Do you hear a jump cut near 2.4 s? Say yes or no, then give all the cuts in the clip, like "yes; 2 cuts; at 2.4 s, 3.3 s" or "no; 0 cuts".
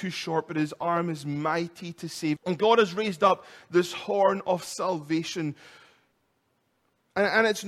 yes; 1 cut; at 2.4 s